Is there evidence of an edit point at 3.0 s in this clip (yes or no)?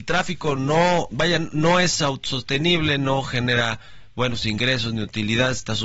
no